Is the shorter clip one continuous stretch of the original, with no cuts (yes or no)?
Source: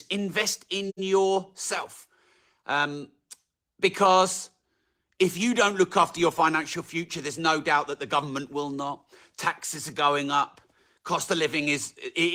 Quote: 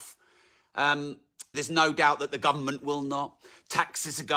no